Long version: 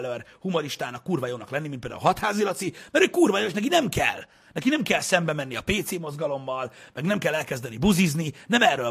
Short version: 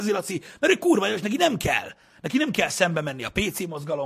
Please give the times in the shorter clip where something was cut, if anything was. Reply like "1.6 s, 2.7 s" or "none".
none